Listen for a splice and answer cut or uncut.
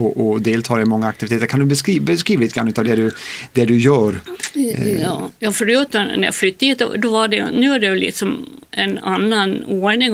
uncut